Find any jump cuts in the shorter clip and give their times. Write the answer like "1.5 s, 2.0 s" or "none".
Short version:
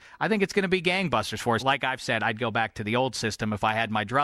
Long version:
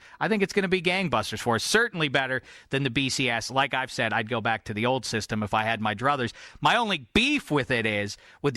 1.6 s